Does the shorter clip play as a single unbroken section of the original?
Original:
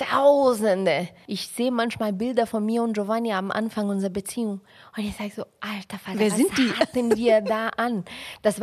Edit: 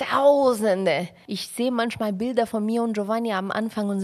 yes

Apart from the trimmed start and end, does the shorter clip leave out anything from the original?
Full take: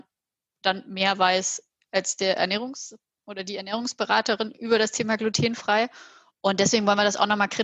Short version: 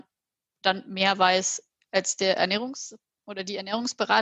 no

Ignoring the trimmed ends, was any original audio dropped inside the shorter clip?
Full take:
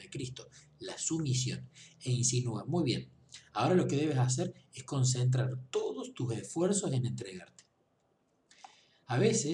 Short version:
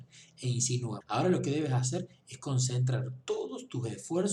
yes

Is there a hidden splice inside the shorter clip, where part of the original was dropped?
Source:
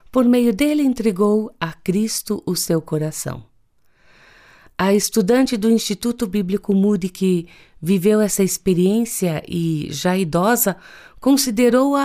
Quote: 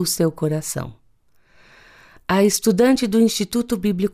no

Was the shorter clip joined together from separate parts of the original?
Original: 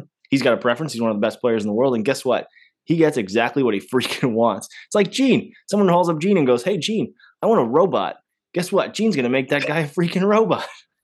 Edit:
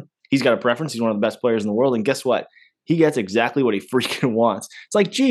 no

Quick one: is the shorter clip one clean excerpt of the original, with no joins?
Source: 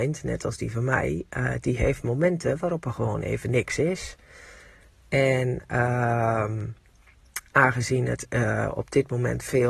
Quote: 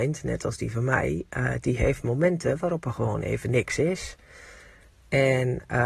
yes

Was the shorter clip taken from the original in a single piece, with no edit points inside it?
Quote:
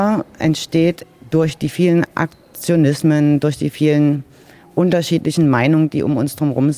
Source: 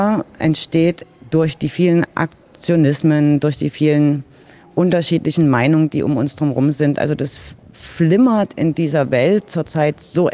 yes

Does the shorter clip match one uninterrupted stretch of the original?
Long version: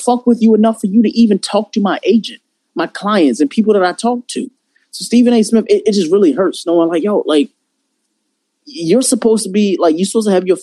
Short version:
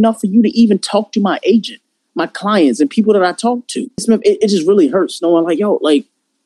no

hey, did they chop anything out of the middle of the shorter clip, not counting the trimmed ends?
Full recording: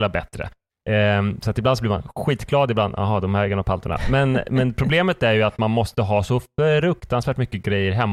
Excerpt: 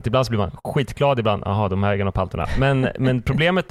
no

